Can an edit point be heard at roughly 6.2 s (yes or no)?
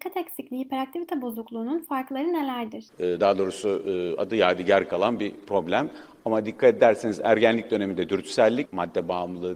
no